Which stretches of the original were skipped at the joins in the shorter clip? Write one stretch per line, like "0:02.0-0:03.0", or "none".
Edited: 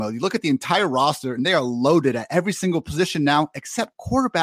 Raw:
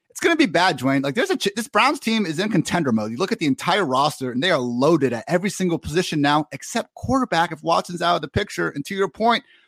none